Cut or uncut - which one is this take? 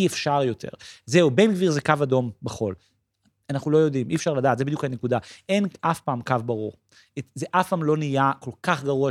uncut